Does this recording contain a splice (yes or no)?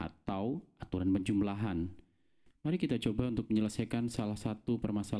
no